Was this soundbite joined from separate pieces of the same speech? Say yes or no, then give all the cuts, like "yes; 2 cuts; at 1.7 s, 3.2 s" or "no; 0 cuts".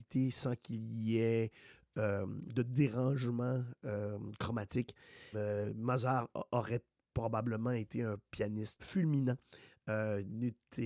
yes; 2 cuts; at 5.3 s, 8.8 s